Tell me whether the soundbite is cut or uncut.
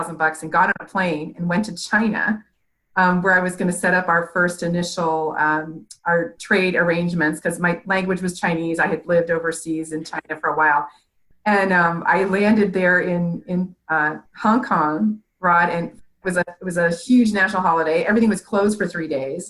uncut